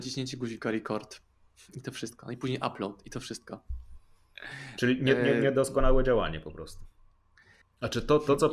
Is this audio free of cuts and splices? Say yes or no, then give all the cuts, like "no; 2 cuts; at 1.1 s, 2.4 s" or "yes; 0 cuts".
no; 1 cut; at 7.6 s